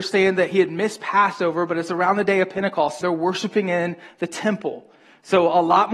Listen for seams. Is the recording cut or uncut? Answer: cut